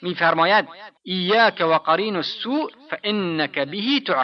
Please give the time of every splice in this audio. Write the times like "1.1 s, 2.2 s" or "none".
1.0 s